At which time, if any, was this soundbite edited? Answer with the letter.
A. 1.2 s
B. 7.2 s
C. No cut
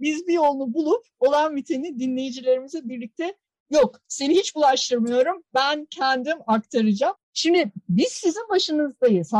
B